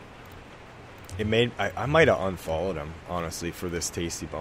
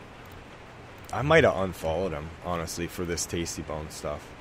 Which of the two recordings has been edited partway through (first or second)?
second